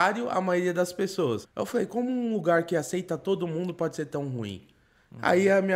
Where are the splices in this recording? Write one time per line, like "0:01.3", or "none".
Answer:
0:01.4